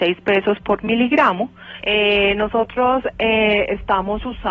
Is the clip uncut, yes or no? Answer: no